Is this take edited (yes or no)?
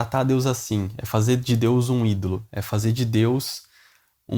no